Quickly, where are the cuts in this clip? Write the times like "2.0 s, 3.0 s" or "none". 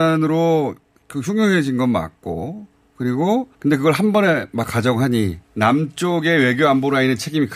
3.5 s, 5.4 s